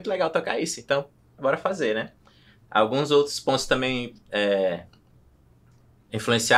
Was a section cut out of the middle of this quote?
yes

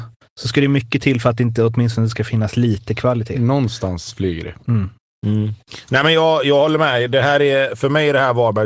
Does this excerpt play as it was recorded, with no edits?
yes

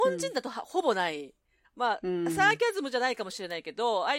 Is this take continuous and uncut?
no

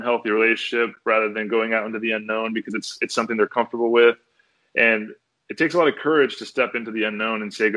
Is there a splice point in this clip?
no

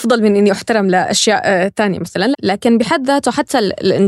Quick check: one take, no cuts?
no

